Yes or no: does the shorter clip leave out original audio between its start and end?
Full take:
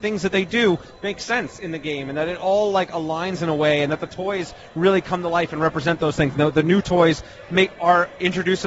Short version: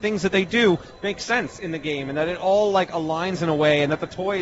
no